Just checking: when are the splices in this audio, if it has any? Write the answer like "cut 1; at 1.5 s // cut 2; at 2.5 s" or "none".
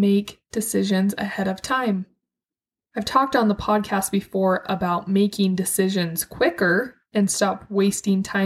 none

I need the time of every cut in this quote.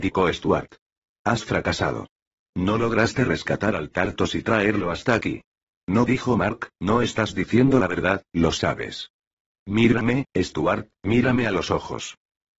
cut 1; at 5.7 s

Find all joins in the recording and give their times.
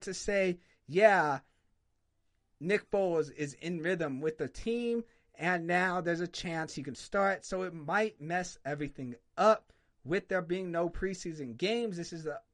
none

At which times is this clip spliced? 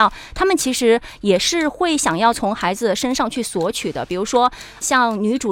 none

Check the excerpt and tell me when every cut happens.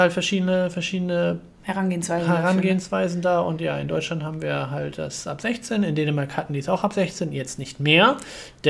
none

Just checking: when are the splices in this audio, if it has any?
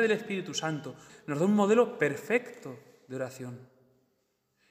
cut 1; at 1.1 s

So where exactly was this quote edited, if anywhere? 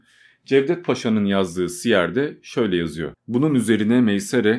cut 1; at 3.1 s

